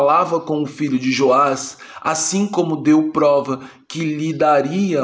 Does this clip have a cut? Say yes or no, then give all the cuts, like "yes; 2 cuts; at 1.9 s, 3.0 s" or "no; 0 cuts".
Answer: no; 0 cuts